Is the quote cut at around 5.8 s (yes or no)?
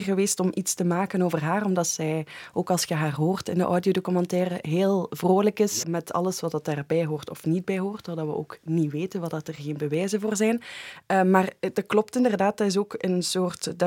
yes